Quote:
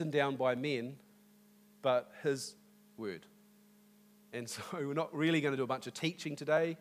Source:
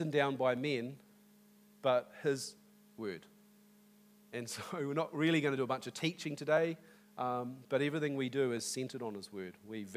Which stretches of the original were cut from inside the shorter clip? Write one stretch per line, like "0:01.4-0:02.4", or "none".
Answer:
none